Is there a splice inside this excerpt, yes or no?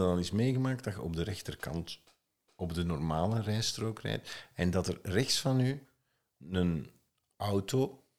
no